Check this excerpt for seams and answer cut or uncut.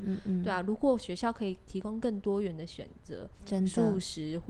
uncut